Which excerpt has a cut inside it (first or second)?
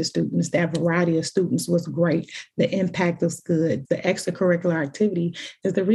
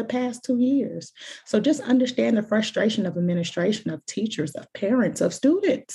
first